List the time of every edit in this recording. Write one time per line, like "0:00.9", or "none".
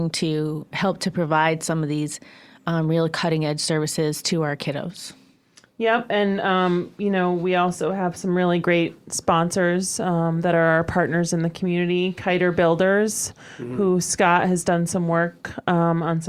none